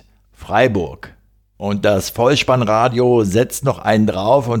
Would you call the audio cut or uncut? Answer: cut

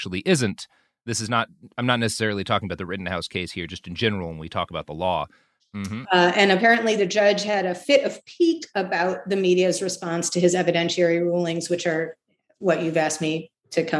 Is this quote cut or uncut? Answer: cut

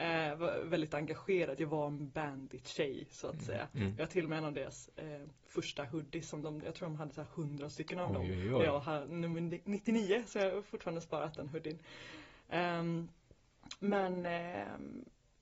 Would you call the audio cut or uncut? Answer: uncut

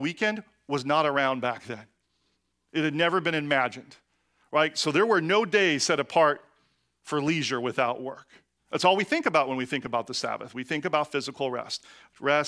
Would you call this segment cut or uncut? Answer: cut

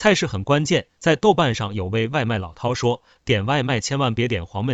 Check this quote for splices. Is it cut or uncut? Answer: uncut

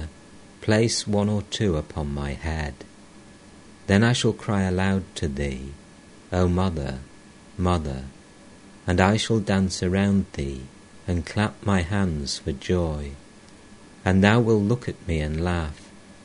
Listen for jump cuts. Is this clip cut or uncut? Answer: uncut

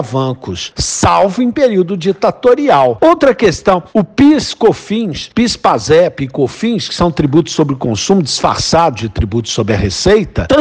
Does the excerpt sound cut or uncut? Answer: cut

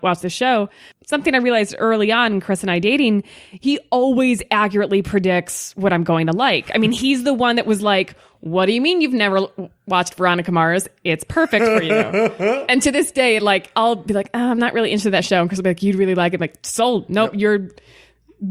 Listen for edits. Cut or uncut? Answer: uncut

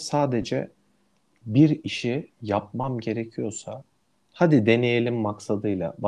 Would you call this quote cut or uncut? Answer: uncut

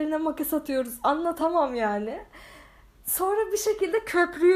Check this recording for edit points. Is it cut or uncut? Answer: uncut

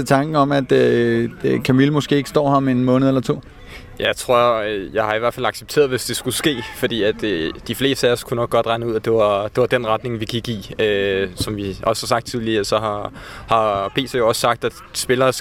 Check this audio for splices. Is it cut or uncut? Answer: uncut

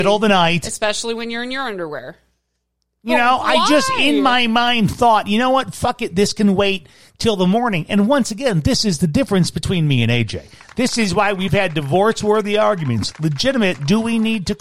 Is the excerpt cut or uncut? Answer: uncut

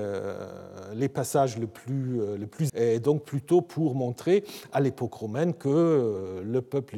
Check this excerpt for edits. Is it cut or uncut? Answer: cut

